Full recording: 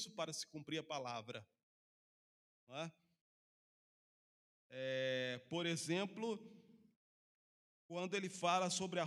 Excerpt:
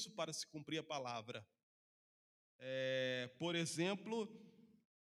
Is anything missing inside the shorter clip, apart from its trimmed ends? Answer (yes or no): yes